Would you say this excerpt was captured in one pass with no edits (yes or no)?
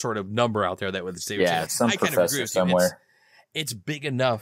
no